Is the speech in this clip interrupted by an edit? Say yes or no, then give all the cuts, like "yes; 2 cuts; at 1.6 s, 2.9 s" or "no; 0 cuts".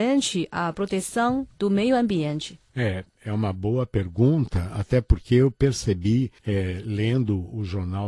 yes; 2 cuts; at 2.7 s, 6.4 s